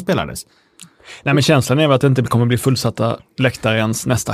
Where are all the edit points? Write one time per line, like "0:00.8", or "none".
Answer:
none

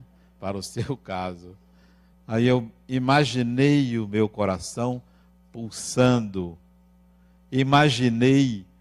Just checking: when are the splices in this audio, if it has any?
0:02.1

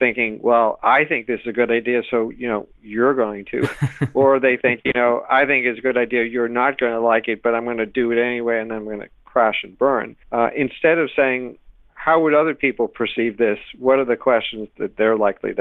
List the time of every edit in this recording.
0:10.2

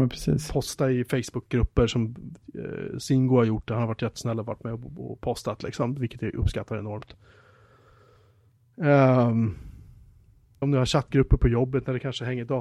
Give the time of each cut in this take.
0:10.6

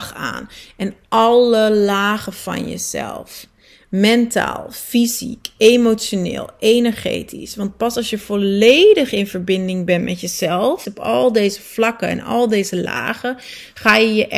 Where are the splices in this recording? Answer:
0:10.8

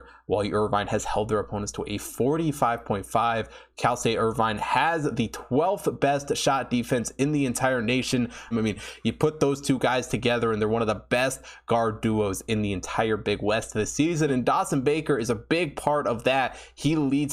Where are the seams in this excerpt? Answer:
0:08.5
0:14.3

